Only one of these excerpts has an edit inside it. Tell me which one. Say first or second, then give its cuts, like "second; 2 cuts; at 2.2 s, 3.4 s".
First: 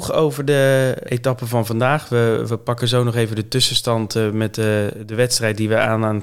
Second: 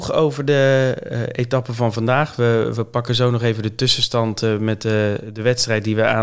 first; 1 cut; at 1.1 s